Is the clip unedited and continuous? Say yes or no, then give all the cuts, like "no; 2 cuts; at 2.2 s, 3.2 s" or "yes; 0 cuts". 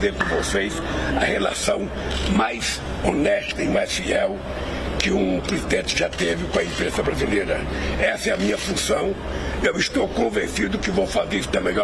yes; 0 cuts